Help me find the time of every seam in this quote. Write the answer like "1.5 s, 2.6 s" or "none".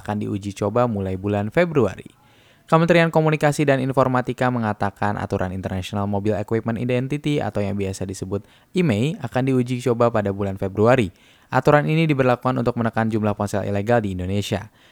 none